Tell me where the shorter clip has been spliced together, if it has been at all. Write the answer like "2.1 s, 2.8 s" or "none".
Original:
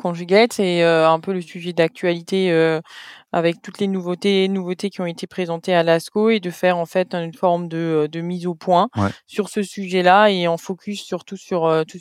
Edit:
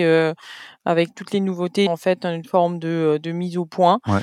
1.9 s